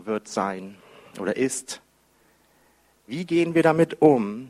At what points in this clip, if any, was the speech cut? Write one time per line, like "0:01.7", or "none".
none